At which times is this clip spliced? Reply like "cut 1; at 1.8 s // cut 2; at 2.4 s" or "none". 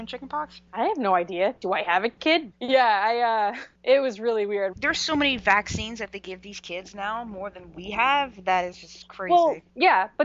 cut 1; at 2.5 s // cut 2; at 4.7 s